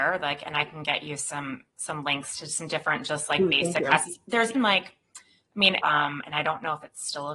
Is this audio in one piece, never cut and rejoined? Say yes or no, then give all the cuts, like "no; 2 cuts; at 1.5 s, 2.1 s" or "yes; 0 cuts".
no; 2 cuts; at 4.5 s, 5.8 s